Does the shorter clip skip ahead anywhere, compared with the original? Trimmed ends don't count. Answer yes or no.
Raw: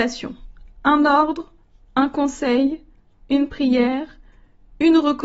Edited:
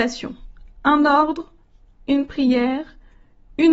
yes